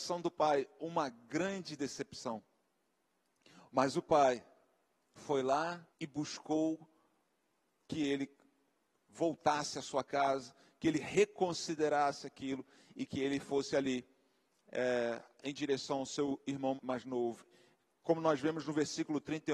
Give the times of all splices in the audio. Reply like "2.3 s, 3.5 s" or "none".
5.9 s, 16.8 s